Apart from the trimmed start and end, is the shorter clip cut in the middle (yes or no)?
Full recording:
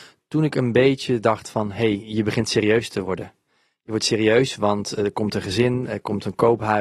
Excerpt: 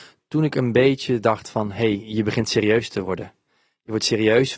no